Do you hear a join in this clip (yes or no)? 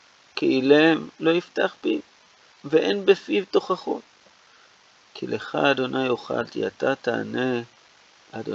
yes